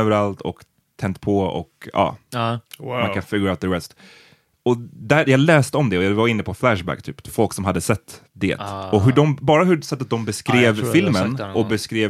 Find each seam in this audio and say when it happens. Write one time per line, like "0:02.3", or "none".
none